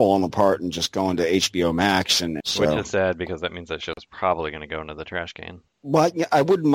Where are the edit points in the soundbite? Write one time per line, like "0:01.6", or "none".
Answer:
0:02.4
0:05.7